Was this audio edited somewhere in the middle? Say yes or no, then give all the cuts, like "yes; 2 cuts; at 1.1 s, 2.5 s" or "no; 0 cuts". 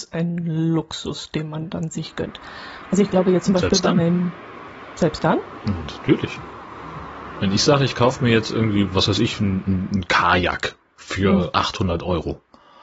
no; 0 cuts